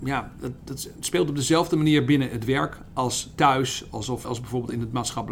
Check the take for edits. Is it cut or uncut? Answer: cut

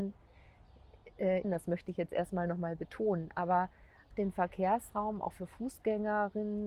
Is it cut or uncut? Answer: cut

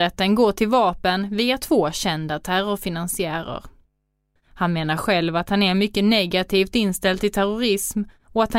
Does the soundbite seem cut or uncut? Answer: cut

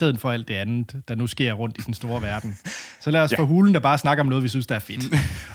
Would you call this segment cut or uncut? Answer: uncut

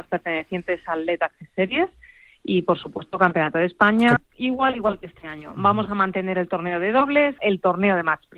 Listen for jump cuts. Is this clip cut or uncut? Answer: cut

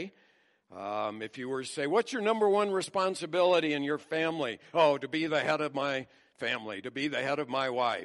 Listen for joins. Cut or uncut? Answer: uncut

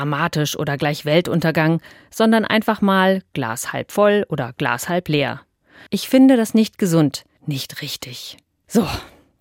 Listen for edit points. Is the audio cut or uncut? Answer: cut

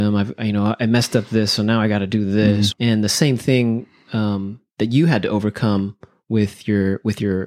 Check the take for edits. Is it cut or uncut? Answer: cut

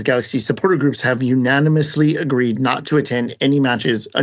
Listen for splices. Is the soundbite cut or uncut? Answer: uncut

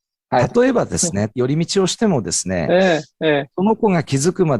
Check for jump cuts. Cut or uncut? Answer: cut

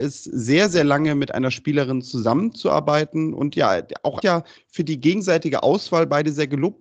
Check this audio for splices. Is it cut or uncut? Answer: cut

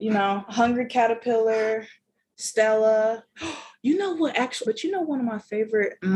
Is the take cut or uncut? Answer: cut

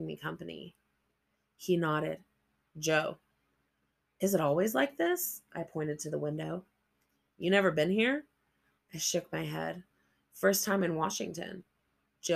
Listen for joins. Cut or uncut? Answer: uncut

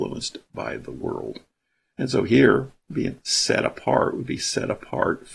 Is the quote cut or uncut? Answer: uncut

